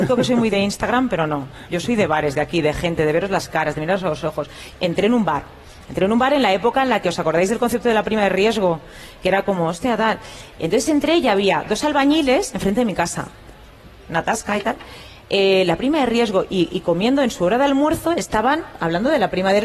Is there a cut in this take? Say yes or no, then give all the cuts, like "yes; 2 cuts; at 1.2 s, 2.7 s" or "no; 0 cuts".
yes; 1 cut; at 4.7 s